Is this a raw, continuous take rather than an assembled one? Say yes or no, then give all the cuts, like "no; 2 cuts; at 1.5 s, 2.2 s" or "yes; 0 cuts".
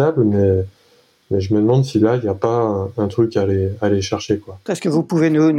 no; 1 cut; at 4.7 s